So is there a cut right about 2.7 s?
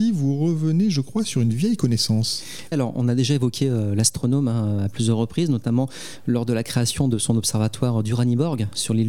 yes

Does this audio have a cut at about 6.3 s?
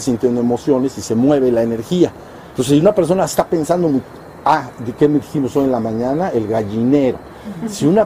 no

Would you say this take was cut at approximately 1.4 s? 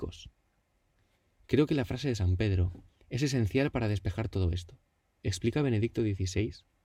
no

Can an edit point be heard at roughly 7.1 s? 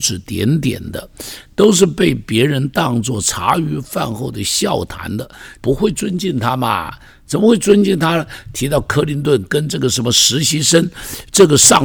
no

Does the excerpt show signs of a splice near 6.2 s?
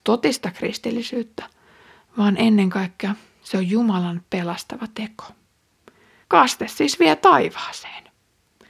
yes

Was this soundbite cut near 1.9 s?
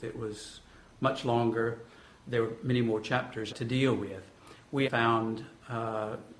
no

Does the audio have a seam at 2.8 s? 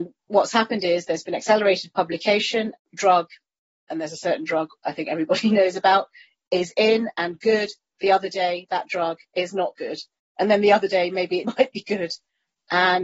yes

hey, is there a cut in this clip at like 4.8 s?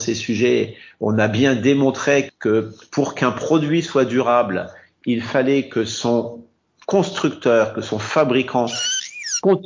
no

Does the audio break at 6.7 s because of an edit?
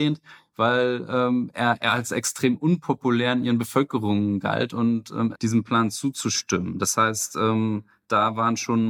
no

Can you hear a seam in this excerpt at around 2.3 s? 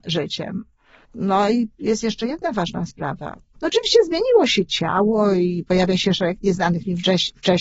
no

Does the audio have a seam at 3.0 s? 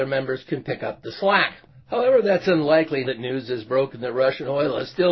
yes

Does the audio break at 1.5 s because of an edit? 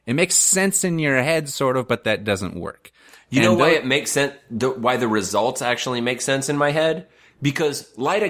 no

